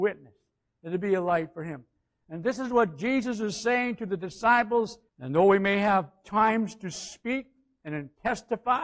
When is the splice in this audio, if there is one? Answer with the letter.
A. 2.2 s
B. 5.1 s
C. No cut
B